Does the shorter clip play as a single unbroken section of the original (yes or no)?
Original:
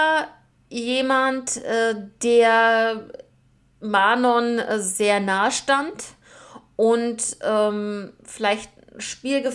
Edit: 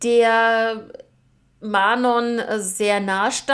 yes